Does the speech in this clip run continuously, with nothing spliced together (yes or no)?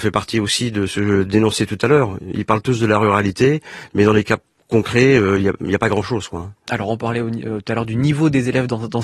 yes